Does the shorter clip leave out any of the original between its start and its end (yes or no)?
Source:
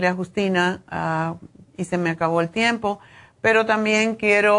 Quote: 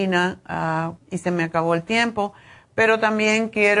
yes